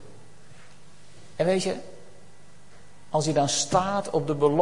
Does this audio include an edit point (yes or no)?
no